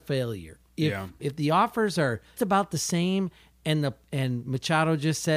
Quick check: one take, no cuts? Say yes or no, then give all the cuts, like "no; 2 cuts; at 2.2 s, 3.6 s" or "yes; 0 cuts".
no; 2 cuts; at 1.2 s, 2.4 s